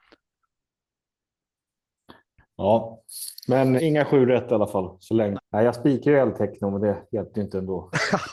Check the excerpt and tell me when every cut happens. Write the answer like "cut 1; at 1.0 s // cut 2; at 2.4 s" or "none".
cut 1; at 3.8 s // cut 2; at 5.4 s